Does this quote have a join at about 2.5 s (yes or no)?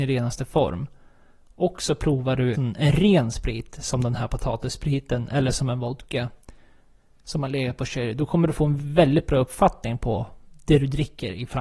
yes